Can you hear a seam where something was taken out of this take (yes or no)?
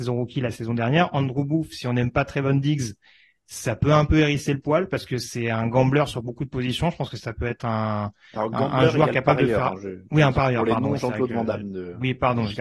no